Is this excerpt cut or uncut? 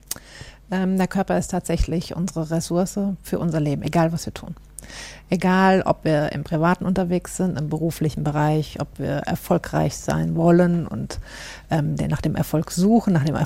uncut